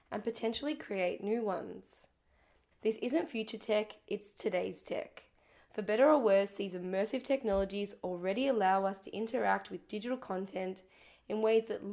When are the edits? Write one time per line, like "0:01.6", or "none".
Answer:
0:02.7

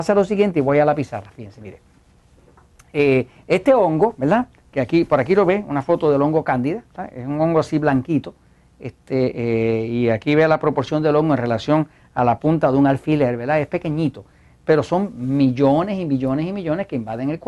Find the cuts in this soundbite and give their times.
none

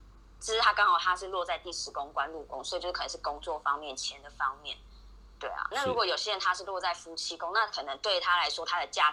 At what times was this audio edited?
0:05.7

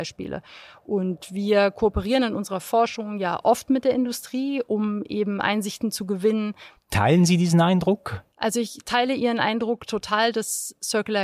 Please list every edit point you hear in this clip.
0:06.8
0:08.3

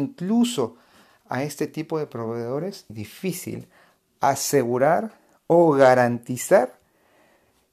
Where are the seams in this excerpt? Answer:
0:02.9

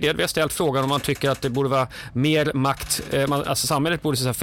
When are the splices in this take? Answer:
none

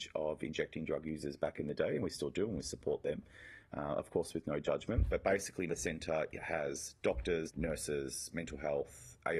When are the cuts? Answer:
0:05.7
0:07.5

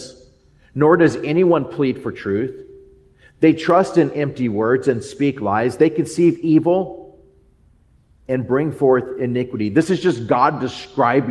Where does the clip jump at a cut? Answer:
none

